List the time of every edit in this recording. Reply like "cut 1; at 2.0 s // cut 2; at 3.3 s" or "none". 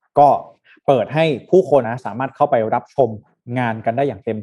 cut 1; at 1.8 s